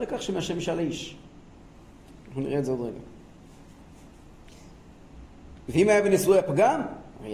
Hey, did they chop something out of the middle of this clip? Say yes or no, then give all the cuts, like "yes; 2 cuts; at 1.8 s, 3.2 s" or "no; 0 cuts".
no; 0 cuts